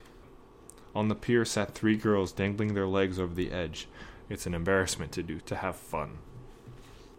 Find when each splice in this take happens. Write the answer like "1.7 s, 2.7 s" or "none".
0.9 s, 4.3 s, 5.4 s